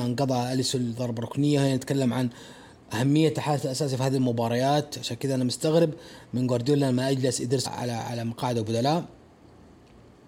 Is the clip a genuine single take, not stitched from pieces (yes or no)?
no